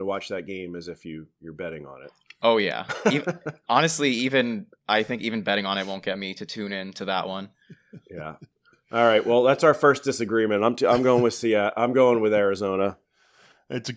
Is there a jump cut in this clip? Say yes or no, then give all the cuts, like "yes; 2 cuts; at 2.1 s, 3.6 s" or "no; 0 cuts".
no; 0 cuts